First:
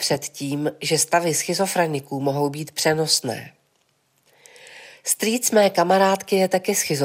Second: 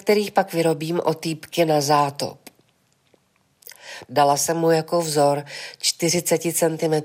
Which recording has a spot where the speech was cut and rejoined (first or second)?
second